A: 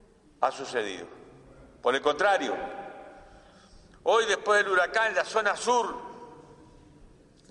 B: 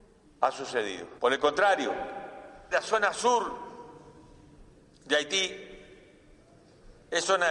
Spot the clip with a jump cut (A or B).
B